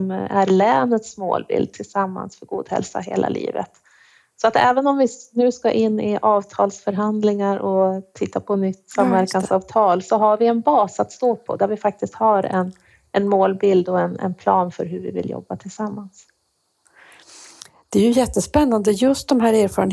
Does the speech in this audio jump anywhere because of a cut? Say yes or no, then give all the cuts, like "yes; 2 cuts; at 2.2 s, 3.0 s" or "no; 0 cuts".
no; 0 cuts